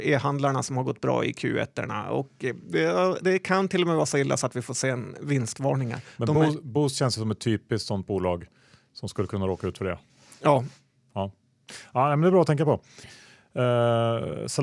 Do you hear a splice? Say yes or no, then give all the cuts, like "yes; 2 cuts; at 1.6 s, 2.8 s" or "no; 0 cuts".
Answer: no; 0 cuts